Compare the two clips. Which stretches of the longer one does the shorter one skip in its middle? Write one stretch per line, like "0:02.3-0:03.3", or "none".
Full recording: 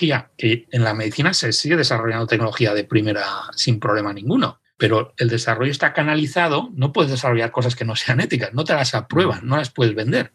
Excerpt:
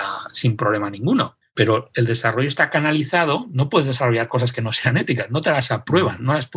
none

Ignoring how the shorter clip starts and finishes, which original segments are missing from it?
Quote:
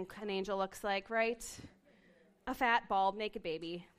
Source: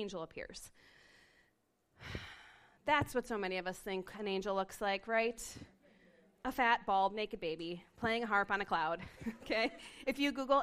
none

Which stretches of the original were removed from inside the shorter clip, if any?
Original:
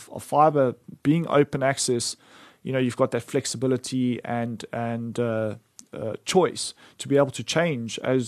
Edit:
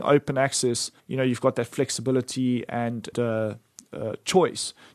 0:02.3-0:02.6
0:04.7-0:05.1

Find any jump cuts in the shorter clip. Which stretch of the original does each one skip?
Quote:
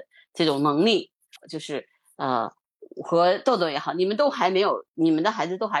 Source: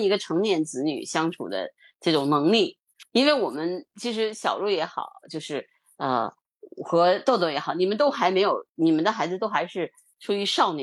0:03.0-0:05.2

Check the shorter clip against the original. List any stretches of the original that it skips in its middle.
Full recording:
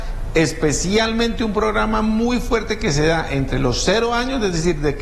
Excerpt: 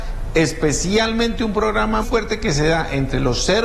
0:02.0-0:02.4

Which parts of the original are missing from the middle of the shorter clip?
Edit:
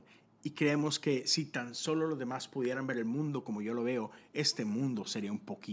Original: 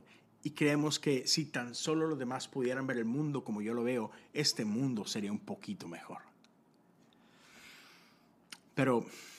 none

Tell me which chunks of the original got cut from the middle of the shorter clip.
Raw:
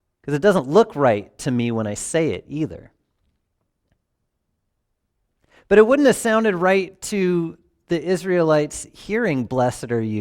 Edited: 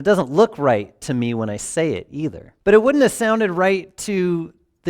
0:03.0-0:05.6

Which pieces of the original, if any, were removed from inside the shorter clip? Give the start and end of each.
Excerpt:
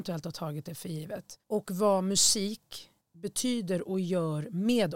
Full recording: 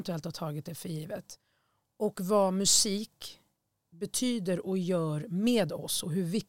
0:01.4-0:01.9
0:03.5-0:03.8

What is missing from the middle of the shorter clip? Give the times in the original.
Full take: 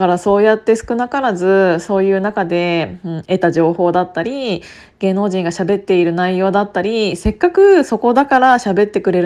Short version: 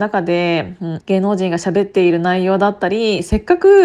0:03.2-0:04.9

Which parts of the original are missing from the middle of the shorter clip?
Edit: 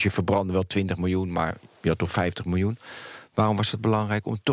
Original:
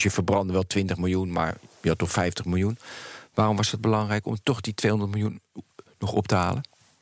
none

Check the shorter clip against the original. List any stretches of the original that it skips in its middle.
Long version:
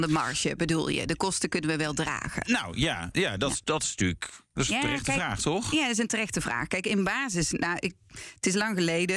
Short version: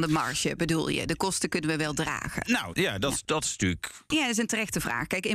0:02.7-0:03.1
0:04.5-0:05.7

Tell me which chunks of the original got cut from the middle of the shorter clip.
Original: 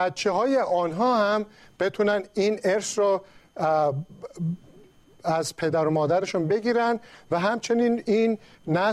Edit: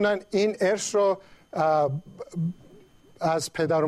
none

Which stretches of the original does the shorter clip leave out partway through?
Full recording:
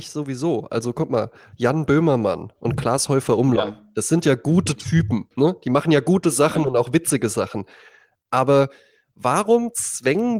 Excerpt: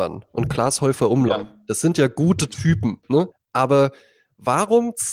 0:05.6-0:08.1

